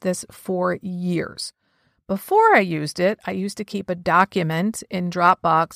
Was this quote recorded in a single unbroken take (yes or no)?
yes